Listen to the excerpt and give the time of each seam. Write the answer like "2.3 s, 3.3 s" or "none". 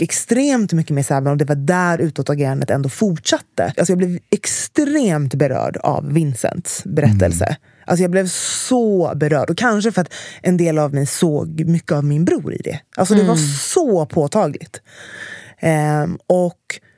3.7 s